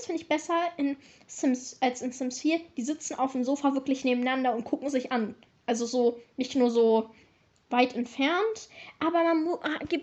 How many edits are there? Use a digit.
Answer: 0